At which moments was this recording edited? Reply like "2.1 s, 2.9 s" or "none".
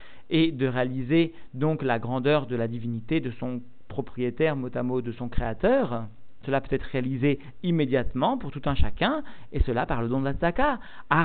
6.4 s